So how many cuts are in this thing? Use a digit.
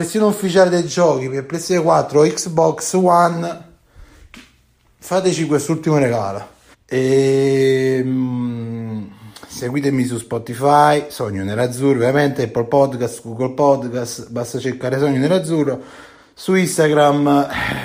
1